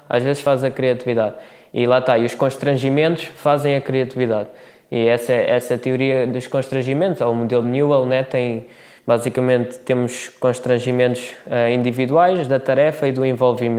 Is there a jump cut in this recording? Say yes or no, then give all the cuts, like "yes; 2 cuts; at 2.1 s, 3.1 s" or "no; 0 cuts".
no; 0 cuts